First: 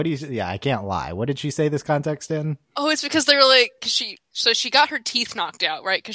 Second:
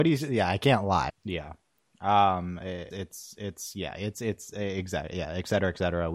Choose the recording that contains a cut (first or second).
second